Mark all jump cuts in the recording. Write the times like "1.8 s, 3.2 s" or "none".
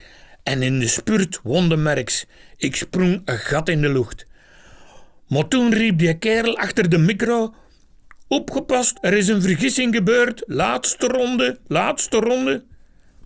8.9 s, 10.5 s